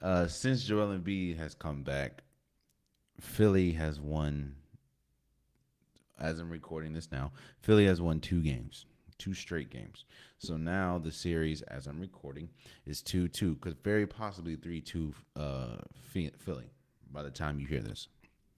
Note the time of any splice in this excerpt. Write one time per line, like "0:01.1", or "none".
none

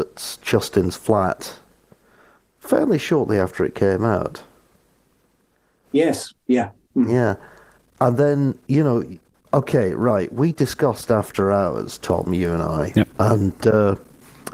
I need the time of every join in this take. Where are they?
none

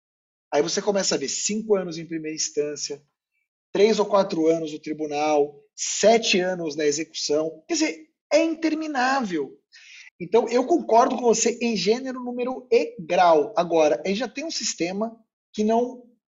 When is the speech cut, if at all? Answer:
0:10.1

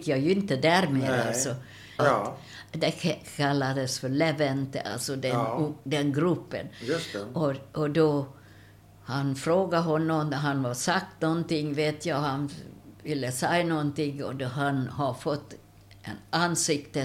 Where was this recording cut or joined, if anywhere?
0:02.0

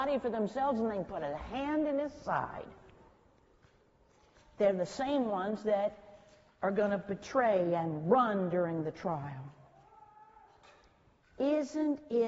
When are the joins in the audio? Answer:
none

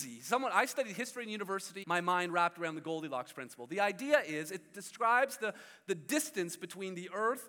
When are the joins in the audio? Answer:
0:01.8

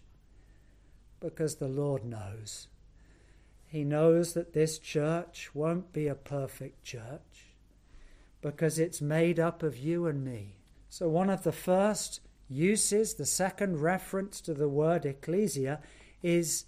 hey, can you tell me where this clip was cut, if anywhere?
0:10.7

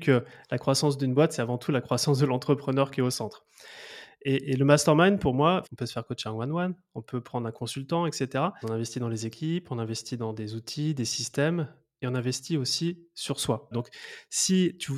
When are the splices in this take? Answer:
0:05.6
0:08.6
0:13.7

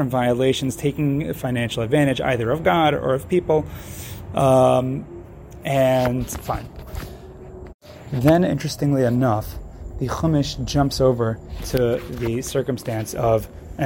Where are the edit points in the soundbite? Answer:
none

